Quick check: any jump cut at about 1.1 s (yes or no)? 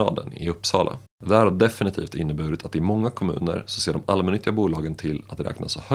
yes